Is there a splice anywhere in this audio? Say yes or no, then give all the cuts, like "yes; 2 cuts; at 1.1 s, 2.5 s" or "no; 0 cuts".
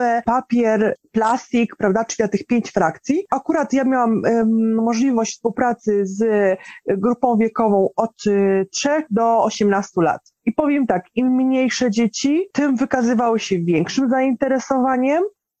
yes; 1 cut; at 3.3 s